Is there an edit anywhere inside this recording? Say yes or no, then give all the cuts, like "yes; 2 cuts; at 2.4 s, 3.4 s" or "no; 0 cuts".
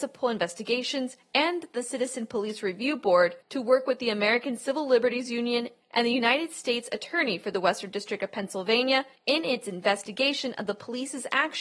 yes; 1 cut; at 5.8 s